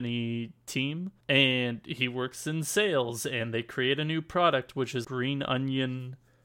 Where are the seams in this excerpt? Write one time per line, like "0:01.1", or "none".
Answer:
0:01.2
0:05.0

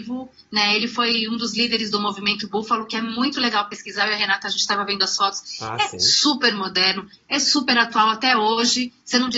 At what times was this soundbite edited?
none

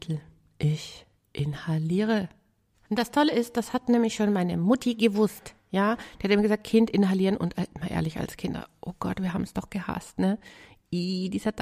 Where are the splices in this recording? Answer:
0:02.9

